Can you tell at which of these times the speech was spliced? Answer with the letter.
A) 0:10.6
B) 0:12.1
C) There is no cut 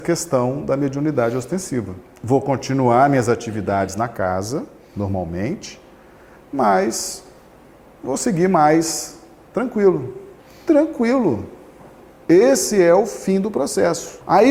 C